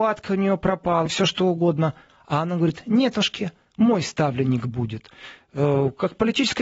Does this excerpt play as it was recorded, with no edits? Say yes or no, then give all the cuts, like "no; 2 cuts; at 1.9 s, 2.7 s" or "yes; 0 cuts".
no; 1 cut; at 1.1 s